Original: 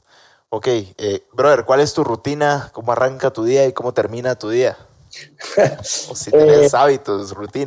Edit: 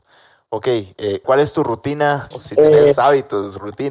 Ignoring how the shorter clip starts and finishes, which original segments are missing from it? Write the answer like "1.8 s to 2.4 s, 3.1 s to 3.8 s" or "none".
1.2 s to 1.6 s, 2.7 s to 6.1 s

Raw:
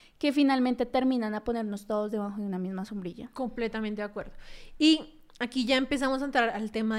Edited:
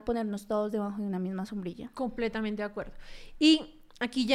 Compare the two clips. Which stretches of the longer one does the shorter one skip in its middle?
none

